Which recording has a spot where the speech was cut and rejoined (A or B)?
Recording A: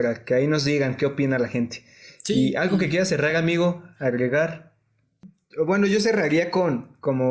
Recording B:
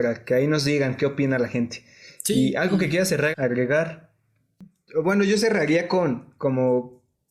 B